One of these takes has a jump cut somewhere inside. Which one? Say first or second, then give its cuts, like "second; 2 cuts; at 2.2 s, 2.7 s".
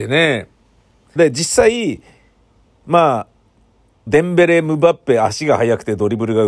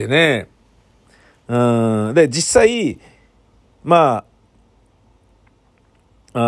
first; 2 cuts; at 1.2 s, 4.1 s